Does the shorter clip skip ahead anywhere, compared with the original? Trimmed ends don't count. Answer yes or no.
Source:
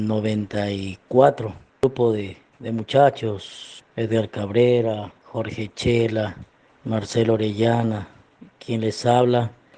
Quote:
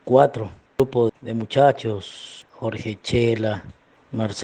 yes